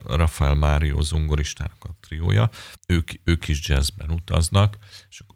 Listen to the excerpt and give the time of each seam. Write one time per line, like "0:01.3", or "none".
0:02.8

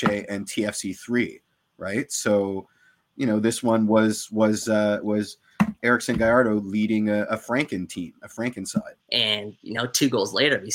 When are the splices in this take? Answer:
0:09.0

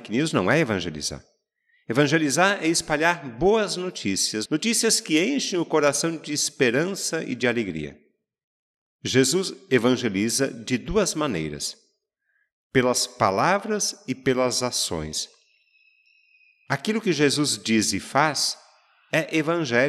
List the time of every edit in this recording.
0:04.5

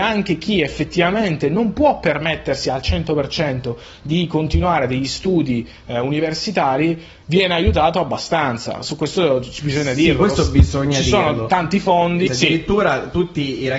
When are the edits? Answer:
0:12.3

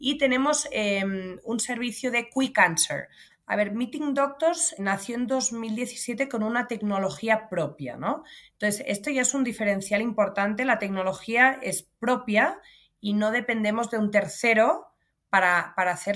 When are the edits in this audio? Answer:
0:03.3
0:04.8

